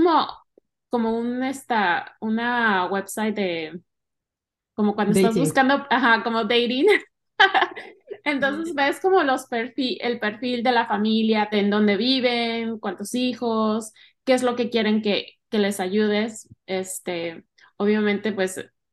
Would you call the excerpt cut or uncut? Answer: cut